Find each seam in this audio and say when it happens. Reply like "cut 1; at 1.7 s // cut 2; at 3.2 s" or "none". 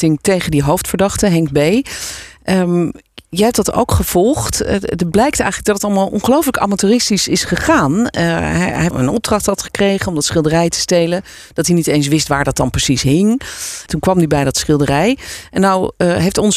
cut 1; at 8.9 s // cut 2; at 13.9 s